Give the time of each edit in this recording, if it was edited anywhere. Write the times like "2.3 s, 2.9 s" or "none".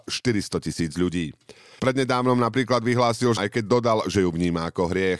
1.8 s, 3.4 s